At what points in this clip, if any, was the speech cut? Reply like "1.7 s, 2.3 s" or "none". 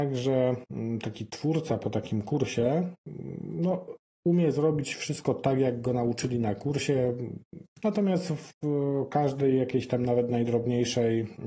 7.7 s